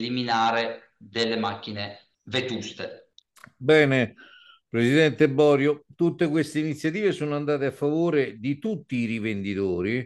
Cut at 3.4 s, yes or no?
no